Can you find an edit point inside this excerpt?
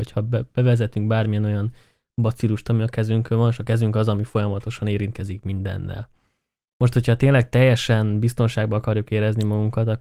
no; 0 cuts

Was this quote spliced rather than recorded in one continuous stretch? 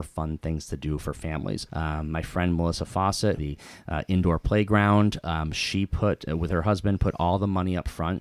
yes; 2 cuts; at 1.7 s, 3.4 s

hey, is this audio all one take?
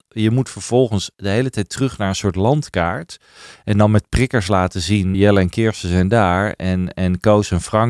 no; 1 cut; at 5.1 s

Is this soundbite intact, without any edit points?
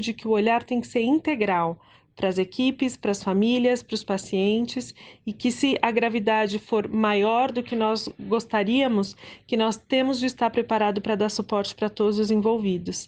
yes; 0 cuts

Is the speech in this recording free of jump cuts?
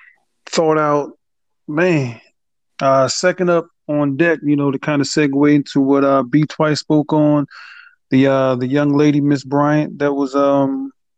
yes; 0 cuts

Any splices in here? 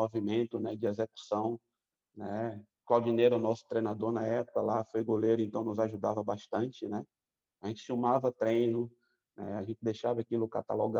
no; 0 cuts

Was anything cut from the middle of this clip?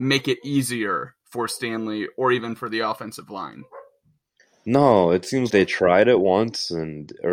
yes; 1 cut; at 5.5 s

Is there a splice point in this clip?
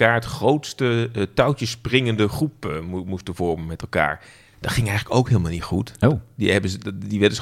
no; 0 cuts

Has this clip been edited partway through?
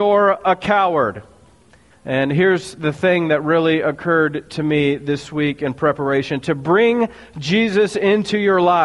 yes; 1 cut; at 1.9 s

